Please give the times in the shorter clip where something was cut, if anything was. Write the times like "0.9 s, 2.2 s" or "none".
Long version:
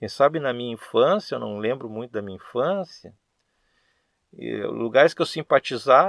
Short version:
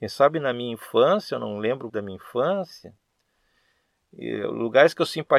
1.9 s